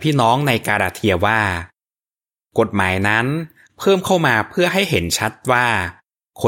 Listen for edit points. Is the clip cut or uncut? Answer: uncut